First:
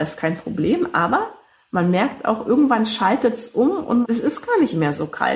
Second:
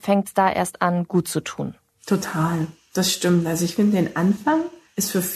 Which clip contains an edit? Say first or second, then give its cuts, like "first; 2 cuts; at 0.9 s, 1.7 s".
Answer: second; 1 cut; at 1.9 s